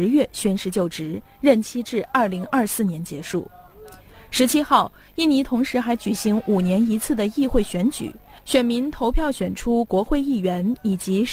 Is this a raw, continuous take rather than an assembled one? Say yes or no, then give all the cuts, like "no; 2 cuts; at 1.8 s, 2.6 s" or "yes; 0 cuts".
yes; 0 cuts